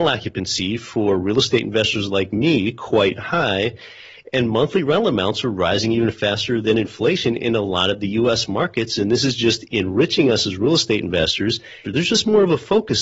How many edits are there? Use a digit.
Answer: 1